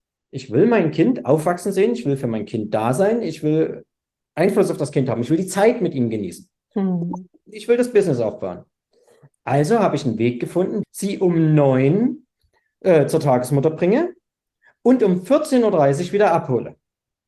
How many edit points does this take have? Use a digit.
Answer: 1